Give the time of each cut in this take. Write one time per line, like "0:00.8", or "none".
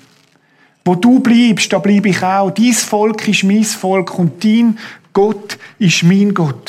none